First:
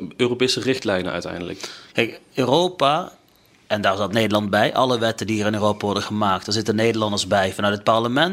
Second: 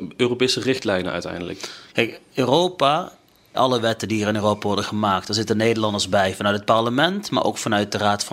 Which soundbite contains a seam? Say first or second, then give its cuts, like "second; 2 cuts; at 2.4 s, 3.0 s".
second; 1 cut; at 3.5 s